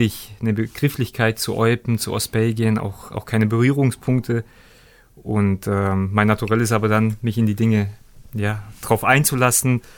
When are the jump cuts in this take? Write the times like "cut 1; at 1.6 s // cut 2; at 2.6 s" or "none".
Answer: none